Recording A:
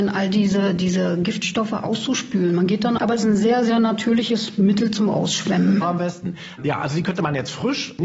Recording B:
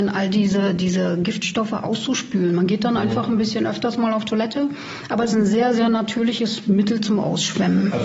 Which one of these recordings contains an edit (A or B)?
A